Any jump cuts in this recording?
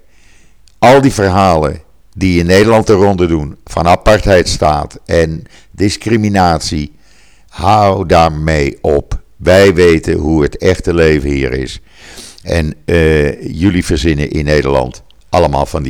no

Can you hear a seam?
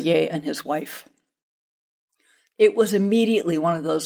yes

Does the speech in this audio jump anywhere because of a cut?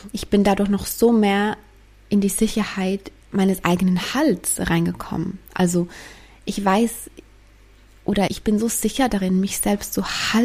yes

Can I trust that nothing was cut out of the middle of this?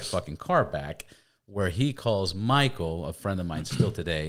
yes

